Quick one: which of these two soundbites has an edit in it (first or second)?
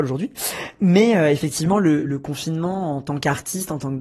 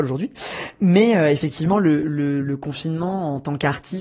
first